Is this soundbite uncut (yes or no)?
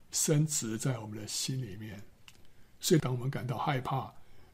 no